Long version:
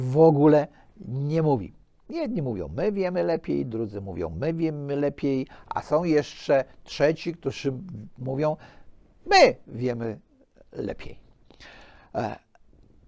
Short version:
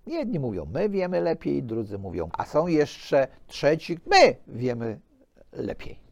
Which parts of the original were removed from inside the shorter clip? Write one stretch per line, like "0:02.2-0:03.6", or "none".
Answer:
0:04.3-0:05.6
0:07.3-0:09.2